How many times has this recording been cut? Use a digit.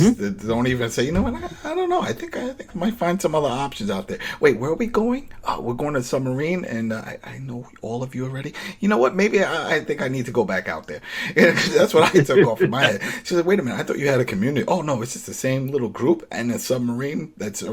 0